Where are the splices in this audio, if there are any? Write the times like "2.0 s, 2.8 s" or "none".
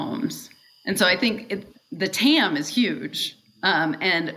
1.7 s